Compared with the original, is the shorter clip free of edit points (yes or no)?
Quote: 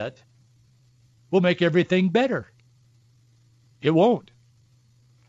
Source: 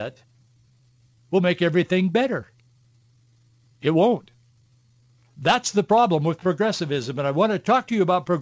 yes